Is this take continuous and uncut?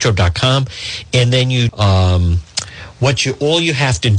no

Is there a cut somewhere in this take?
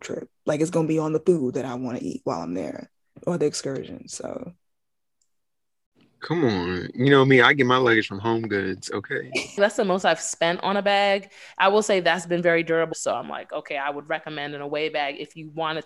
yes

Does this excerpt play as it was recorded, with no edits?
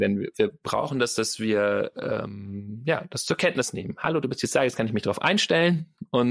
yes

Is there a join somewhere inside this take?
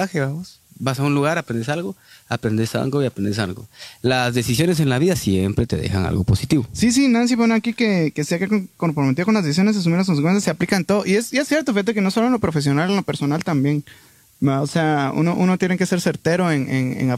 no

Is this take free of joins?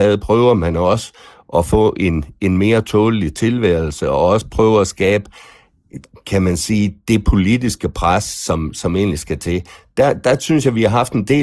yes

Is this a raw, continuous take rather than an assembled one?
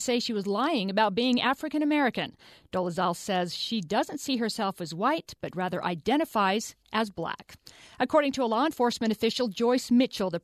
yes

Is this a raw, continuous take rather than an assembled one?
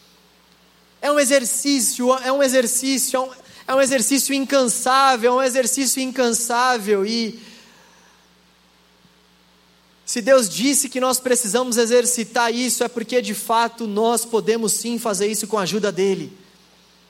yes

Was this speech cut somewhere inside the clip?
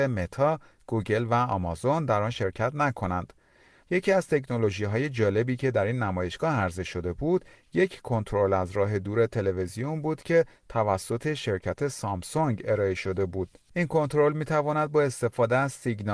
yes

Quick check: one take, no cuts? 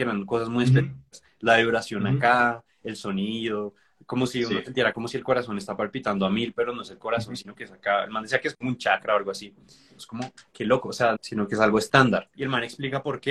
no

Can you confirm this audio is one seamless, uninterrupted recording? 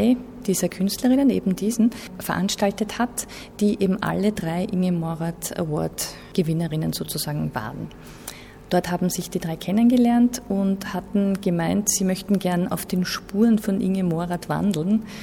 yes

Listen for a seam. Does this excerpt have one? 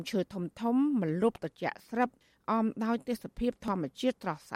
no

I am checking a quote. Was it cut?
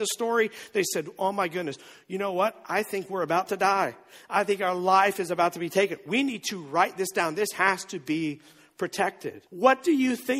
yes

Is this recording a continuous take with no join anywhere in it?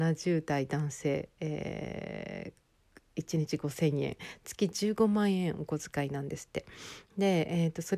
yes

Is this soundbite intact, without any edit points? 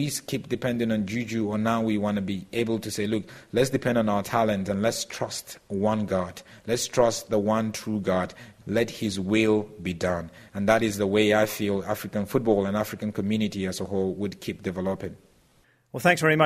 yes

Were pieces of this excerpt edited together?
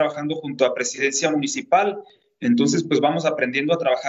no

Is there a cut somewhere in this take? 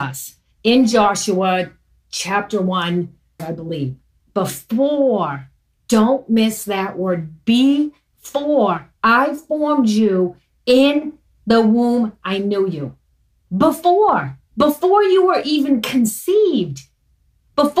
yes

